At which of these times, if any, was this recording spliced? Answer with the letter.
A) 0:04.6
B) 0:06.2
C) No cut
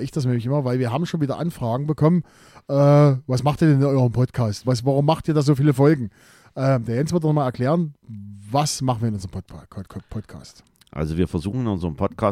A